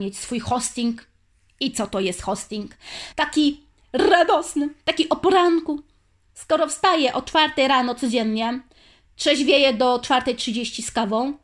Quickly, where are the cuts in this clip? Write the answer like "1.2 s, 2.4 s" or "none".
3.1 s